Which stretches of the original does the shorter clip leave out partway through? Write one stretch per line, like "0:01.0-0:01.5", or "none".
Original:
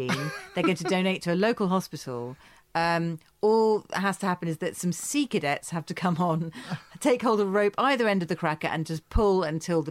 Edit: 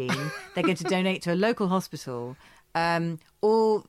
none